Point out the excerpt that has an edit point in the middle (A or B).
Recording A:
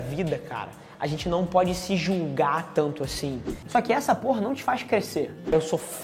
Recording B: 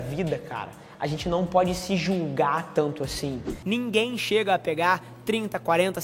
A